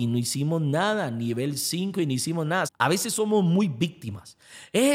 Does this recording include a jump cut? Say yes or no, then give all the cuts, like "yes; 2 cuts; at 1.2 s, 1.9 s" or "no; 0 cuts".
yes; 1 cut; at 2.7 s